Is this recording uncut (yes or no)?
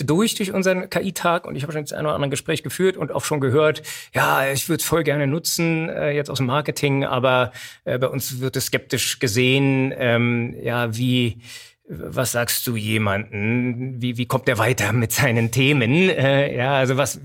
yes